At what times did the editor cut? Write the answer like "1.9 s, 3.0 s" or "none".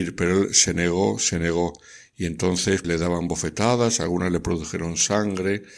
2.8 s